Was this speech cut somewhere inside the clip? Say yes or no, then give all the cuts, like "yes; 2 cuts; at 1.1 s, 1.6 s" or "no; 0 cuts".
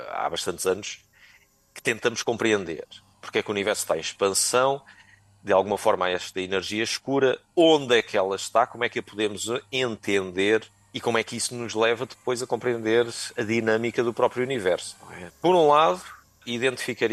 yes; 2 cuts; at 3.1 s, 15.3 s